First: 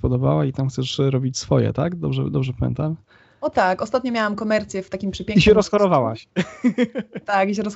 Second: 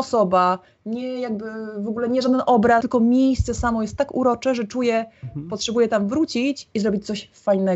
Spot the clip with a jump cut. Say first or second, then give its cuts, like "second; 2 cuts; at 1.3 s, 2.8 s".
second; 1 cut; at 2.8 s